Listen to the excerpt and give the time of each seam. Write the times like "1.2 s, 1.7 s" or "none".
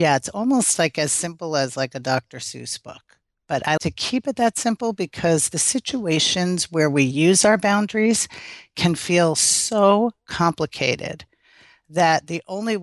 3.8 s